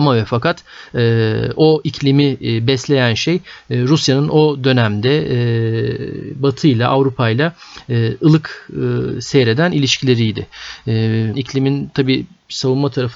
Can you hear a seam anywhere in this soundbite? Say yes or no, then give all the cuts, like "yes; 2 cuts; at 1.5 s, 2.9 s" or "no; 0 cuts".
yes; 1 cut; at 11.3 s